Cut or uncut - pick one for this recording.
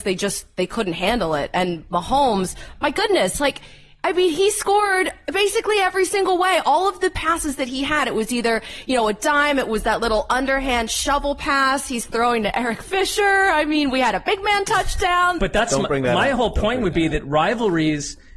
cut